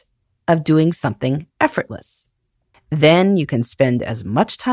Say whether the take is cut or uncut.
cut